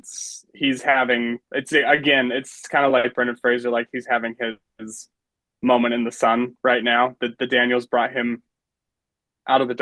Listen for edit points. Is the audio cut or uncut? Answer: uncut